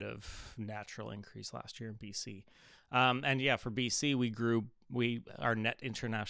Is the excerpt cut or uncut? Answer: uncut